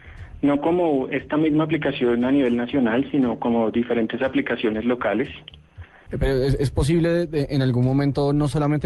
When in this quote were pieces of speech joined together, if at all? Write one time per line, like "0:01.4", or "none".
0:06.1

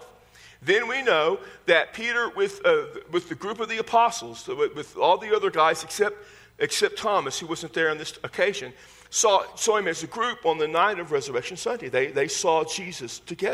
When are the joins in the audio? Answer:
none

